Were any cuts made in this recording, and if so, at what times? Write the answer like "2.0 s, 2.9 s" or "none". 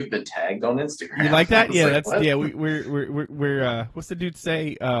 none